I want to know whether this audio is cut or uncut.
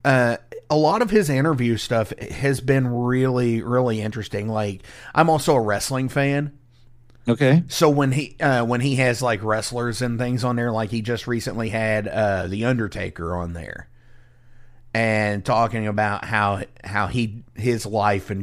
uncut